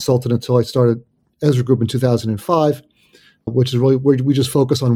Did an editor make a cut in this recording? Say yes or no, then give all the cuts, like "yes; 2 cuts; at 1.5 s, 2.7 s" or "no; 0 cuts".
no; 0 cuts